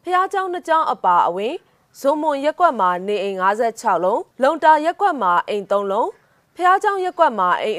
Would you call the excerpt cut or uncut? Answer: cut